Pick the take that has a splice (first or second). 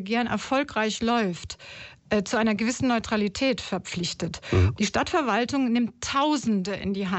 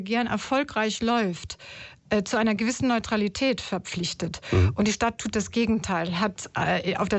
first